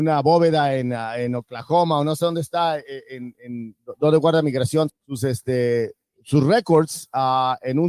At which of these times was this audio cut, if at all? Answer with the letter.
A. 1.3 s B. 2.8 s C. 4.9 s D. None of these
C